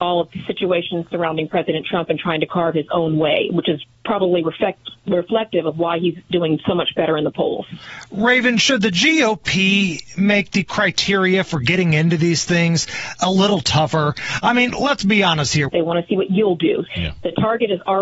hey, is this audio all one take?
no; 2 cuts; at 15.7 s, 16.9 s

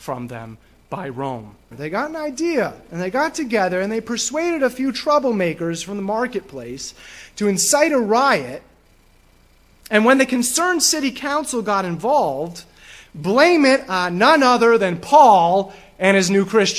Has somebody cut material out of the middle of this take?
yes; 1 cut; at 1.7 s

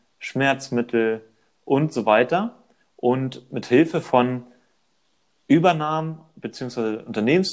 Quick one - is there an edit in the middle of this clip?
no; 0 cuts

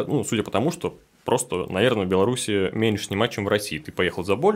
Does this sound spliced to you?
no; 0 cuts

